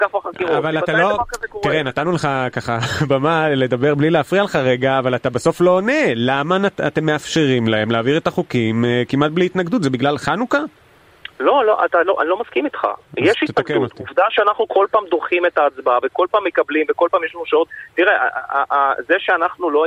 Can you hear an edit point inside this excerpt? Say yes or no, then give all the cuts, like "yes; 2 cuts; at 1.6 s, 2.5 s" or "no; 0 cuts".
no; 0 cuts